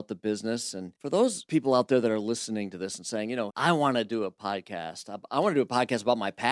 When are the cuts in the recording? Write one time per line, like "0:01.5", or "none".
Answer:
0:03.5